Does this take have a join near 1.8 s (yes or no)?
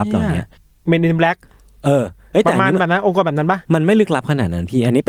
no